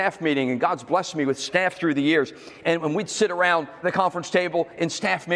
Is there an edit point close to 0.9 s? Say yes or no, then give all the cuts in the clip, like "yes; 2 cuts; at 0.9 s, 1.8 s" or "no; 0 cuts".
no; 2 cuts; at 2.6 s, 3.8 s